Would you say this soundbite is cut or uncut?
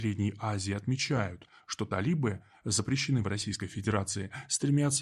uncut